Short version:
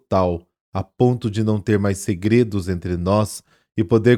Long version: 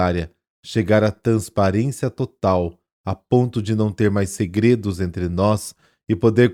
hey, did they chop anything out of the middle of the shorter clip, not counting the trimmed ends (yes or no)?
no